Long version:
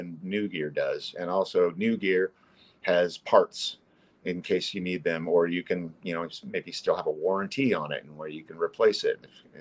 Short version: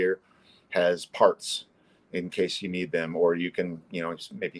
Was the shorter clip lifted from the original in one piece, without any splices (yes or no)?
yes